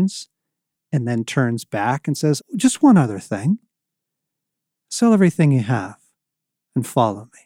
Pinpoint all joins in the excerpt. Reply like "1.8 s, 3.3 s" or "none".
2.4 s

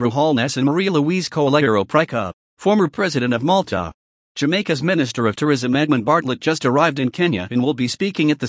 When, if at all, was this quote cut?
4.1 s

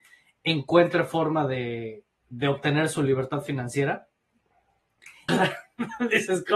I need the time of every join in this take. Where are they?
5.3 s

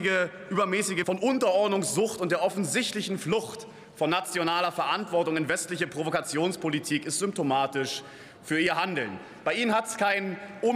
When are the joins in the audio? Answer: 1.0 s

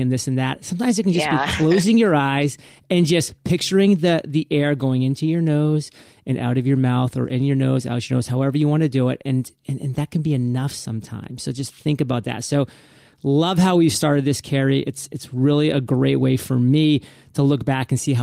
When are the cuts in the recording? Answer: none

